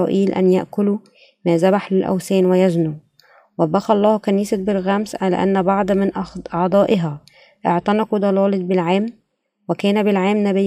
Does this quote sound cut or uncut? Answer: uncut